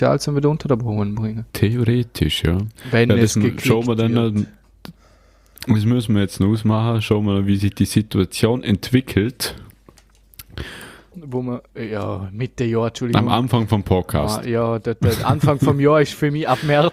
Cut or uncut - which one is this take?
cut